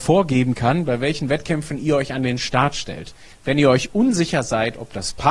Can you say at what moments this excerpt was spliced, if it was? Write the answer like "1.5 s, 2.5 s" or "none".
3.3 s